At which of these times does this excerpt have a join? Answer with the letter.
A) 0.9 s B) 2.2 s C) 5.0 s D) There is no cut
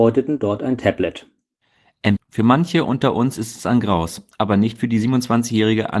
B